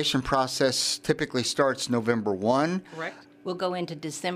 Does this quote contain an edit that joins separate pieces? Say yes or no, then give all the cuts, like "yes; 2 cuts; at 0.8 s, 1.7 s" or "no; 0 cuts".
yes; 1 cut; at 3.2 s